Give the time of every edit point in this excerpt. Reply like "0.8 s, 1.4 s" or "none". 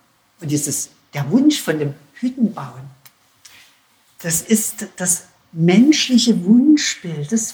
none